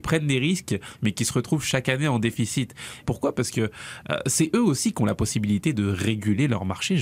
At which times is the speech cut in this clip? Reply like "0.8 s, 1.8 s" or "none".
3.0 s

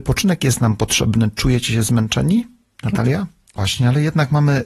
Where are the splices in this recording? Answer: 3.6 s

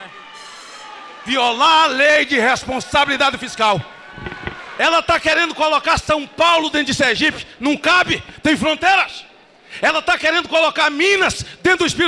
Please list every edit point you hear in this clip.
none

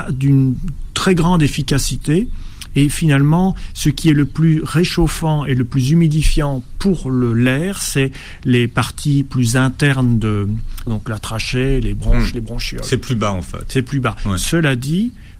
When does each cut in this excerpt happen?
10.9 s

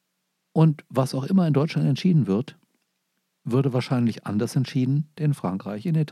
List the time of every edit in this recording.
5.2 s

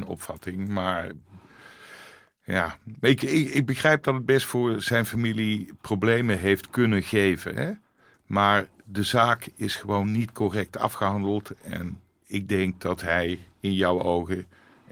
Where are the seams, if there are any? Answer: none

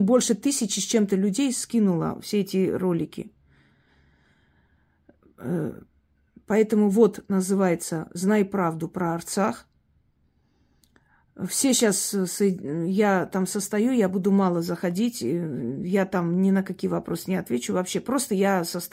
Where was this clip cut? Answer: none

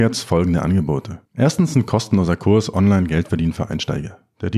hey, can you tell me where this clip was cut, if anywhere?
1.3 s

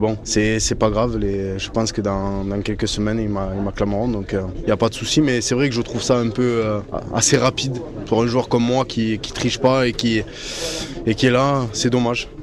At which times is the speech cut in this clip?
none

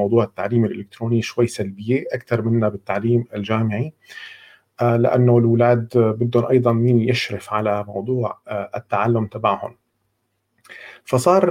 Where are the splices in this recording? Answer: none

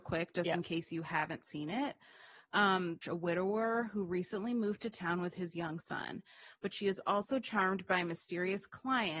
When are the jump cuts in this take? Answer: 3.0 s

